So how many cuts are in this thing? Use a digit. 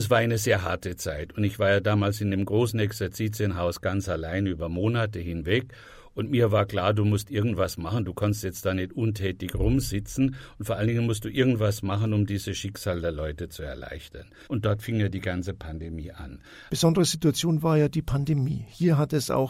2